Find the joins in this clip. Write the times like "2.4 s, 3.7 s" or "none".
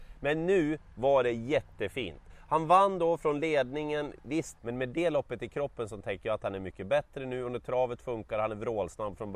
4.6 s